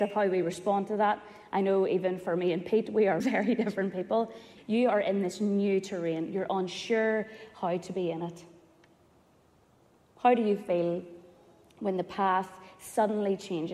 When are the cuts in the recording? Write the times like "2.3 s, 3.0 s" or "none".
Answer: 3.2 s, 4.6 s